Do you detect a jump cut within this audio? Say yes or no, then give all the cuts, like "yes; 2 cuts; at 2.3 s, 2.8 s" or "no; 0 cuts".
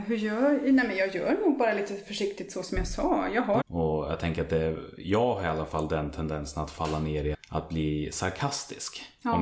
yes; 2 cuts; at 3.6 s, 7.3 s